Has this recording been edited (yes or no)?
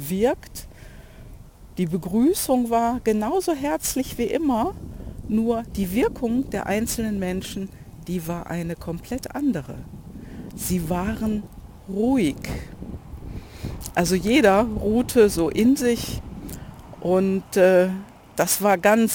no